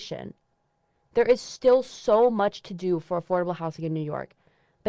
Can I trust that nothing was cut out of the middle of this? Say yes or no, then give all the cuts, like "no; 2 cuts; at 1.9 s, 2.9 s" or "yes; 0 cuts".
yes; 0 cuts